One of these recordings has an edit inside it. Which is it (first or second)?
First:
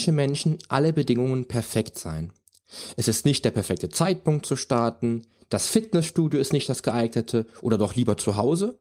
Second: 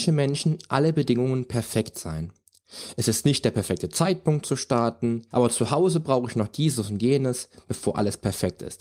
second